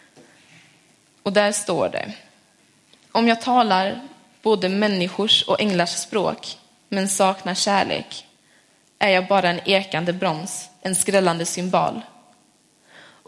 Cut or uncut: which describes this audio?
uncut